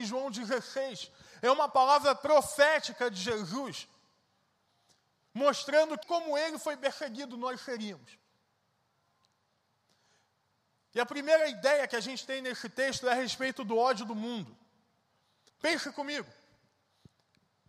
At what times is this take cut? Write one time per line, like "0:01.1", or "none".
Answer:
0:06.0
0:15.5